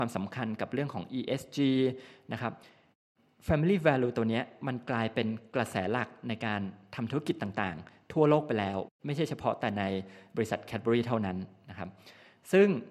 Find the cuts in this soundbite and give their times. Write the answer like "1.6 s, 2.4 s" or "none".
none